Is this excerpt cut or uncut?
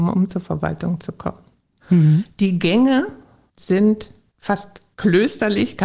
cut